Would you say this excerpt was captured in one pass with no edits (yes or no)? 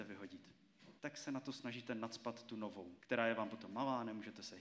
no